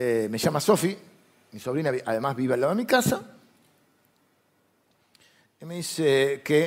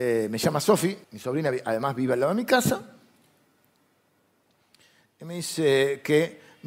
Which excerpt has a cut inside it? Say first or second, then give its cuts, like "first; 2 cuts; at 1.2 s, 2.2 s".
second; 1 cut; at 1.0 s